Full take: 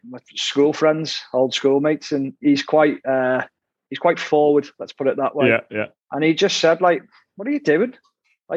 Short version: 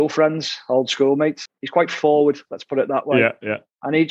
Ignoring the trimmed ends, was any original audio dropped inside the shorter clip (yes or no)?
yes